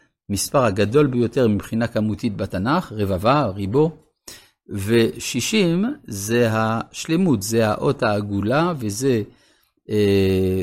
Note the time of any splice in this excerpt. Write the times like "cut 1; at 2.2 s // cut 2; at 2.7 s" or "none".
none